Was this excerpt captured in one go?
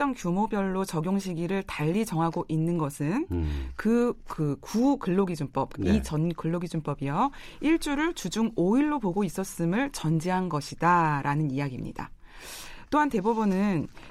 yes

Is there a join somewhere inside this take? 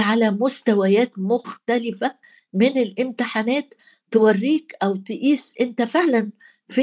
no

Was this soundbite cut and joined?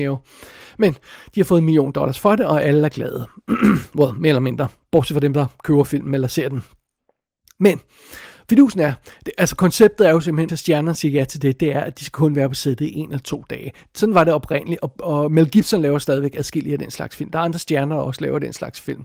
yes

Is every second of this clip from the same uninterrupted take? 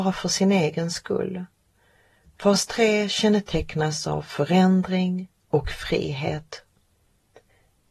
yes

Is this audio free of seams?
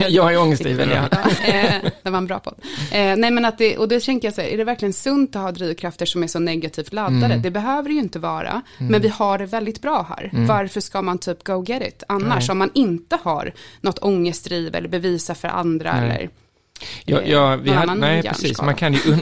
no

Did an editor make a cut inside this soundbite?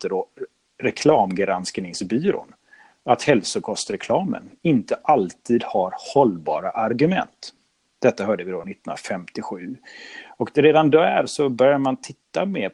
no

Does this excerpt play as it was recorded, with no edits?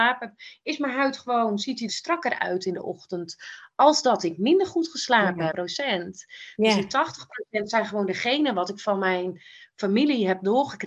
no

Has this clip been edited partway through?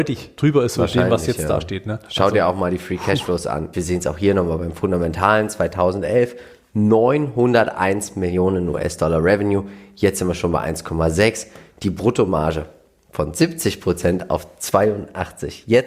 yes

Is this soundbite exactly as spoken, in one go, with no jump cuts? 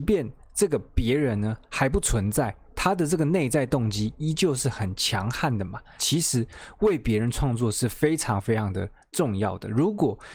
no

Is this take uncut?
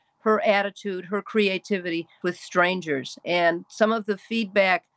no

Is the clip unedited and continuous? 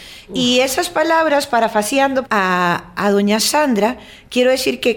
no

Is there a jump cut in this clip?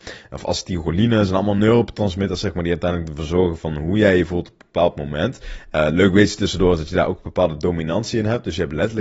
no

